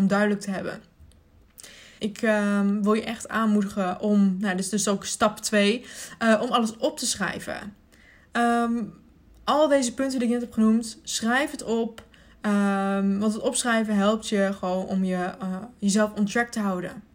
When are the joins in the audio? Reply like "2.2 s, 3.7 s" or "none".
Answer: 2.0 s

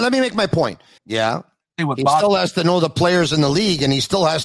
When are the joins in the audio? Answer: 1.0 s

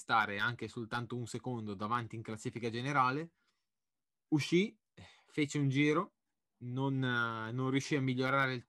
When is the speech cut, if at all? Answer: 4.2 s

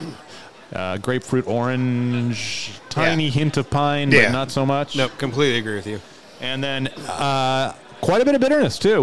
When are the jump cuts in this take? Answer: none

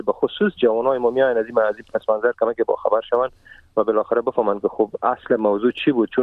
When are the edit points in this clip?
none

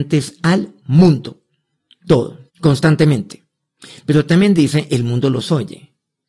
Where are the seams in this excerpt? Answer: 2.5 s

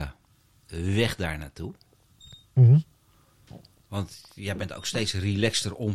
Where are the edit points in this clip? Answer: none

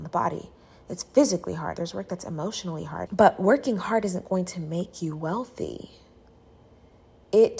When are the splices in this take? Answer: 1.8 s, 3.1 s

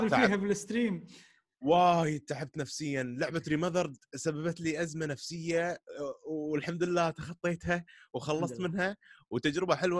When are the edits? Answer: none

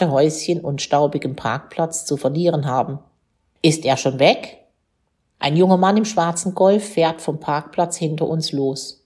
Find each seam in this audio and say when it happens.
3.6 s, 5.3 s

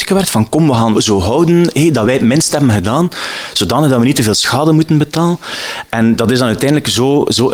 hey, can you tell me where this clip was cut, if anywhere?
0.9 s

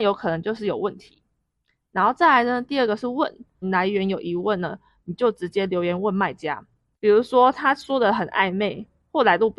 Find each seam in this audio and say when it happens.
3.6 s, 6.9 s

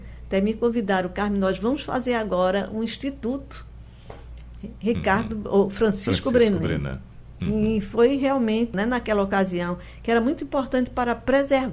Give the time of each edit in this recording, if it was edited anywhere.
8.7 s

